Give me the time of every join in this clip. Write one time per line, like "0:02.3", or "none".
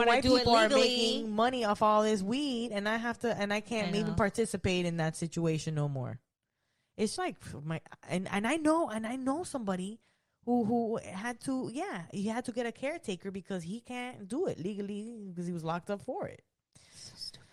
0:07.2